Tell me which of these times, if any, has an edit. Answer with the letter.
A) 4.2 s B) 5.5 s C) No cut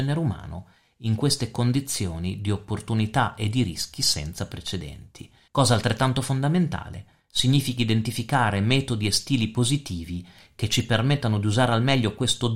B